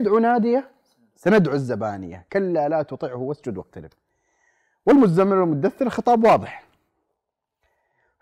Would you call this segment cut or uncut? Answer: uncut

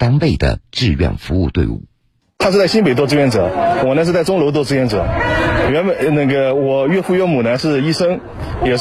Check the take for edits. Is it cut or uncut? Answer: uncut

